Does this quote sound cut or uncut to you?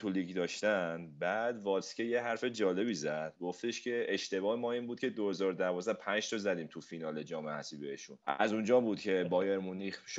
cut